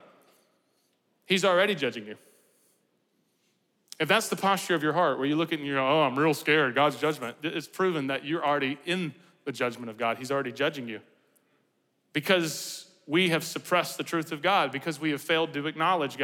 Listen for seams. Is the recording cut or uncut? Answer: uncut